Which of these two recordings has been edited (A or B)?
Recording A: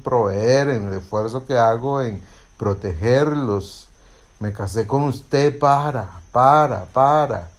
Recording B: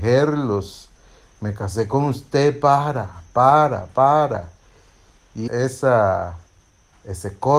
B